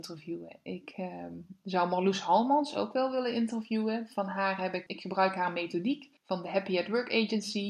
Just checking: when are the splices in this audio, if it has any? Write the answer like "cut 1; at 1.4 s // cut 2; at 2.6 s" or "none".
cut 1; at 4.9 s // cut 2; at 6.2 s